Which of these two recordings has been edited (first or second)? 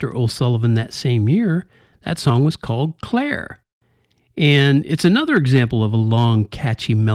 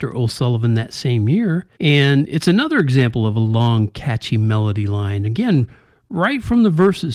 second